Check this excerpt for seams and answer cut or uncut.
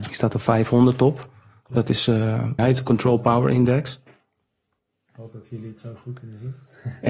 cut